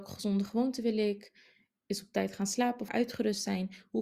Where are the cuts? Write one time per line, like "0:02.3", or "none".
0:02.9